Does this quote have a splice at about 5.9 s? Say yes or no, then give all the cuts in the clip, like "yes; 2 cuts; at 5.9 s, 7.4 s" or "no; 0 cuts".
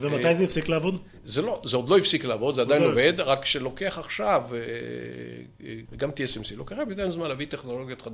yes; 1 cut; at 5.9 s